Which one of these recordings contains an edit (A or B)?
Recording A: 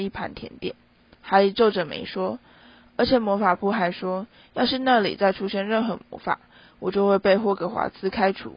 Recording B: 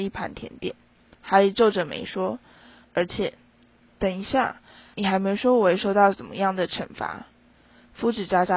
B